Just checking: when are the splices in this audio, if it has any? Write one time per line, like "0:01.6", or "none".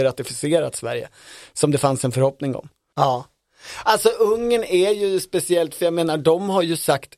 0:02.9